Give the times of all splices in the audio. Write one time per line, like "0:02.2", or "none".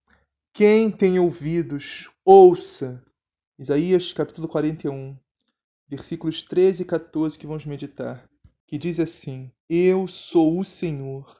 0:03.4
0:09.6